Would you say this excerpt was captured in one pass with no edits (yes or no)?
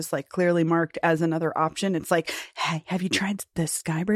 yes